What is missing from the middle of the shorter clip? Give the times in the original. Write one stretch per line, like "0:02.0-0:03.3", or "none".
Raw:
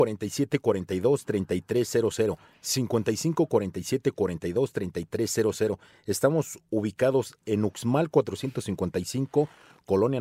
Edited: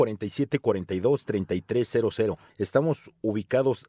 0:02.5-0:06.0